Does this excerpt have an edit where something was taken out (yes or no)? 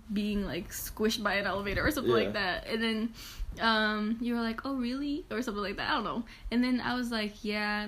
no